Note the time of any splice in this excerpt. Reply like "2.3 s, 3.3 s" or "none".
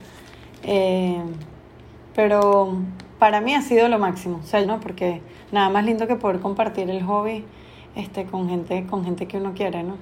4.6 s